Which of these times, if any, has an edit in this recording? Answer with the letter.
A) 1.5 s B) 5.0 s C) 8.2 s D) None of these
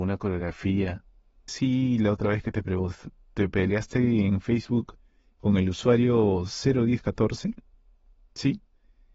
A